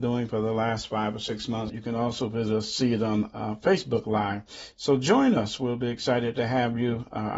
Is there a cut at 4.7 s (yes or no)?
no